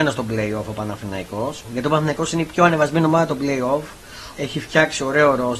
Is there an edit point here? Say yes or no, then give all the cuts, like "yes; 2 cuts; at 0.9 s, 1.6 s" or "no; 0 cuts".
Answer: yes; 2 cuts; at 1.6 s, 4.3 s